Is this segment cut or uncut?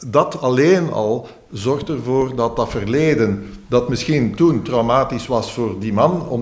uncut